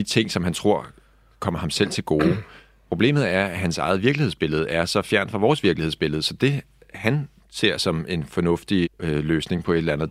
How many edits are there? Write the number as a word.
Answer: one